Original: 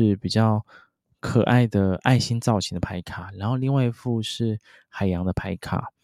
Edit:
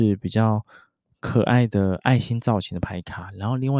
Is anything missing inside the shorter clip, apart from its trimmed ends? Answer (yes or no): no